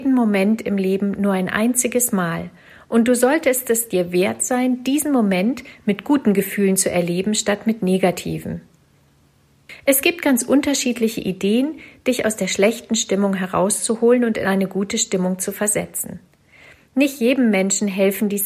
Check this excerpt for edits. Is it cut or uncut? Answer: uncut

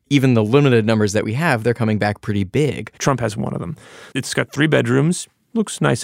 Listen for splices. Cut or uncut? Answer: cut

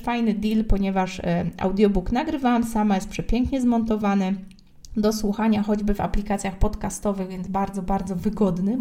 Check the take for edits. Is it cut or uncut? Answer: uncut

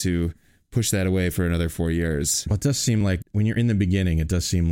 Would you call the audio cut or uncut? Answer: uncut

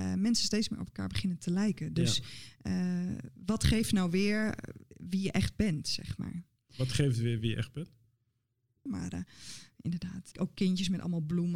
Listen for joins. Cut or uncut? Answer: cut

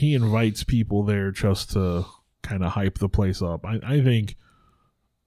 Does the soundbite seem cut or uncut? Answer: uncut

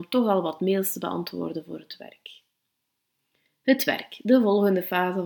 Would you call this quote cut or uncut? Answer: uncut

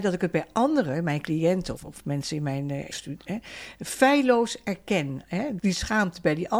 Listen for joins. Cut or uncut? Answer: cut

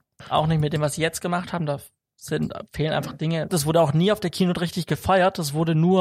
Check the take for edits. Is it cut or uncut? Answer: cut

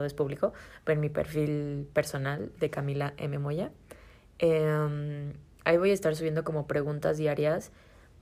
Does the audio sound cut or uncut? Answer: uncut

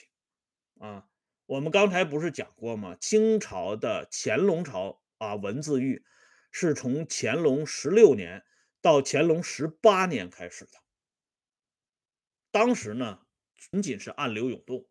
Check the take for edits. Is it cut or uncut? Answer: cut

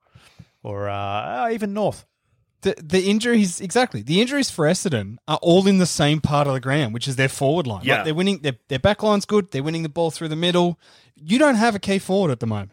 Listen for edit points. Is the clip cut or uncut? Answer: uncut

